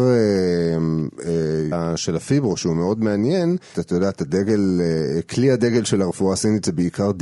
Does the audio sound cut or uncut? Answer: cut